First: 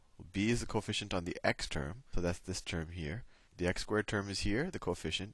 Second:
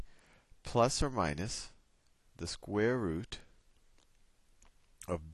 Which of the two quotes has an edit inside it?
first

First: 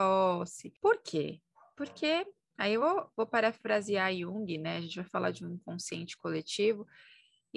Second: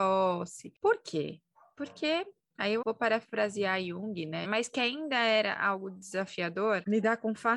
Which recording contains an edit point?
second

